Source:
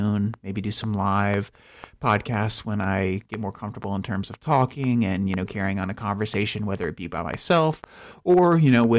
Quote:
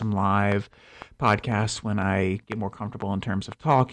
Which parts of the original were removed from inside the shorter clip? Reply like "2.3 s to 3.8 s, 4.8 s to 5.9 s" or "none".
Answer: none